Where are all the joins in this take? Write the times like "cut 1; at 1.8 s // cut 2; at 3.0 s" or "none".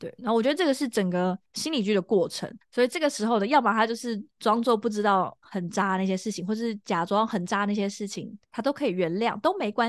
cut 1; at 2.6 s